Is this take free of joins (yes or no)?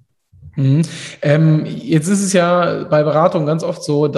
yes